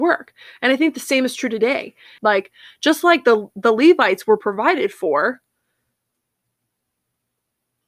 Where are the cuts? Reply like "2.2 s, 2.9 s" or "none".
2.2 s

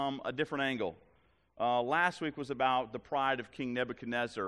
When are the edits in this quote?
none

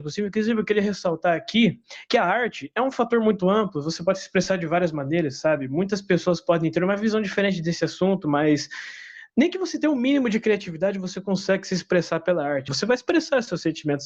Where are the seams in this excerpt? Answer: 9.3 s, 12.7 s

